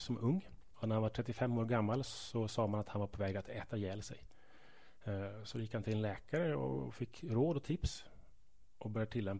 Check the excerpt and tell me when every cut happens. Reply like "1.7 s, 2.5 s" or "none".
2.1 s